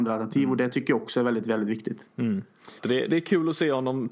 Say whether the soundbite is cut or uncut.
cut